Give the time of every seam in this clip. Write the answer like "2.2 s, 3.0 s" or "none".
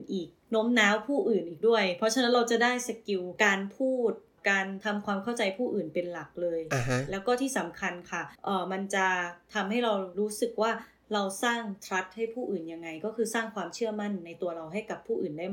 8.3 s